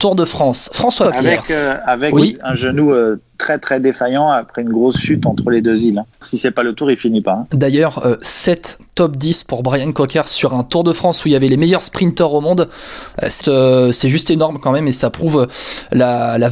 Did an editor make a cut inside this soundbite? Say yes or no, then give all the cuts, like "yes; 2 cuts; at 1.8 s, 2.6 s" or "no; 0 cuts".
yes; 3 cuts; at 6.1 s, 7.5 s, 13.4 s